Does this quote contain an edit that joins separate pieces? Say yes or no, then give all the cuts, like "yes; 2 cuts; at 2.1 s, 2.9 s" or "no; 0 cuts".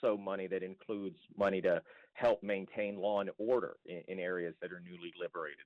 no; 0 cuts